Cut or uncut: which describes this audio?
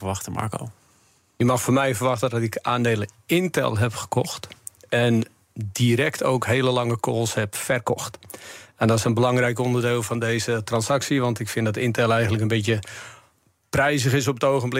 uncut